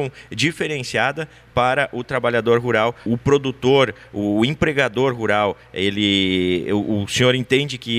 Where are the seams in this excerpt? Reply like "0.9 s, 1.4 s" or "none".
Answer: 3.1 s